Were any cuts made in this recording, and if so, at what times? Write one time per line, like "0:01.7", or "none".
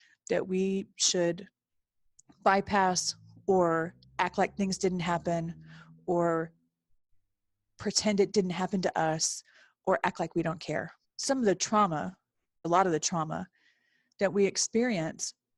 0:11.0
0:12.6